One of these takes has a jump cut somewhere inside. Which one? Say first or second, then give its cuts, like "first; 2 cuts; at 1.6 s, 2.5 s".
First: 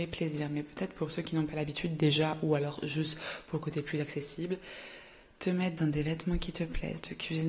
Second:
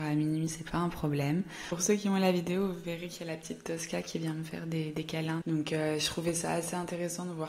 second; 1 cut; at 5.4 s